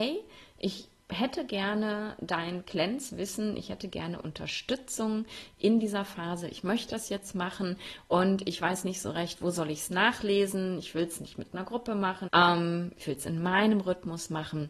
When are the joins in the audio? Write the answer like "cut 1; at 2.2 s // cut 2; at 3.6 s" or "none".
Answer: cut 1; at 12.3 s